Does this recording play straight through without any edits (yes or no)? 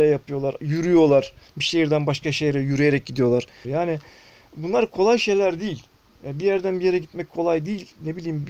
no